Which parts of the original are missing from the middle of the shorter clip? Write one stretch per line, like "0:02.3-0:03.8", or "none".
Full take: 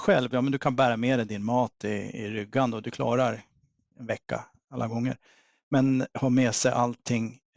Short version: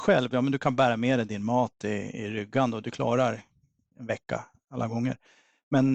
none